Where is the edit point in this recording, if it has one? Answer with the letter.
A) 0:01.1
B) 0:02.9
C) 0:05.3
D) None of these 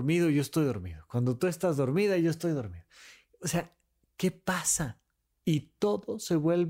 C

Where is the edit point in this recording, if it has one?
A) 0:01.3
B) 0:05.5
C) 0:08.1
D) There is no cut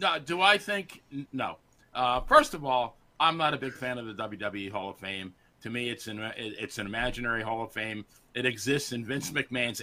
A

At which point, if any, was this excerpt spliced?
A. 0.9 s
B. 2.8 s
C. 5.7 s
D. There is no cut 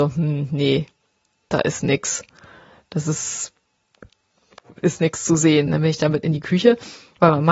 C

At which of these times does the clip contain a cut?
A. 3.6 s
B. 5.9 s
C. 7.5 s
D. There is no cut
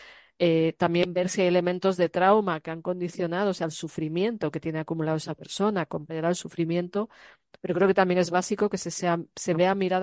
D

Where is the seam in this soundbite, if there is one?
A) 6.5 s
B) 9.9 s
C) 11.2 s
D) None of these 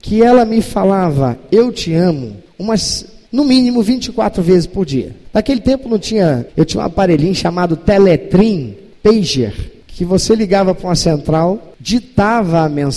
A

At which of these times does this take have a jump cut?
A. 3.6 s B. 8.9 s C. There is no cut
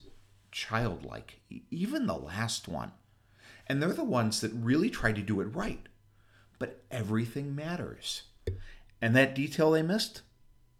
C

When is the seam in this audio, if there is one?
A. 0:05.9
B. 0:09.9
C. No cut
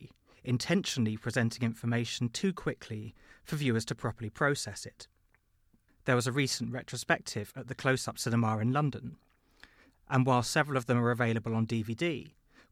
A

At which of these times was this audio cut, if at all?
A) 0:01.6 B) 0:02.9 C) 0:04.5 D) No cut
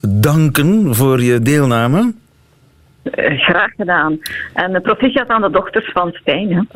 D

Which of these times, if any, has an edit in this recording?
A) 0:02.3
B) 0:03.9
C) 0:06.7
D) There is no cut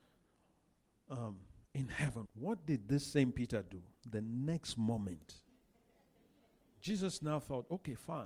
A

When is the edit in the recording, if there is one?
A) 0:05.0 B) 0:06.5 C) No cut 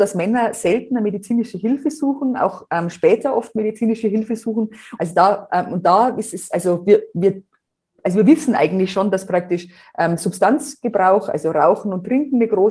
A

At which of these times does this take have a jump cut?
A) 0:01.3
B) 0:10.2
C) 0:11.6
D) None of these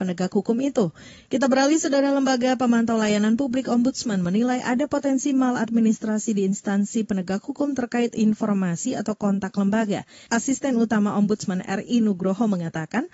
A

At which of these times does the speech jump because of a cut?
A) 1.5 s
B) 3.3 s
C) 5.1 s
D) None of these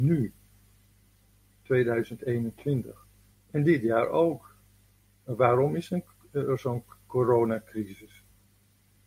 B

